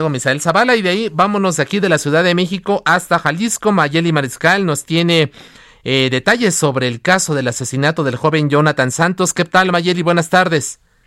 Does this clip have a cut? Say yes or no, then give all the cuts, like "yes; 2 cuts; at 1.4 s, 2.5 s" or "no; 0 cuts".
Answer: no; 0 cuts